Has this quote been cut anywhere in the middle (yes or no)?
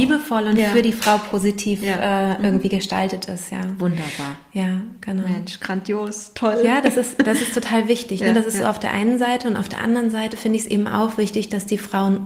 no